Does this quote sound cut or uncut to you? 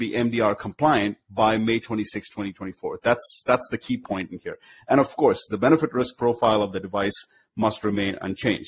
uncut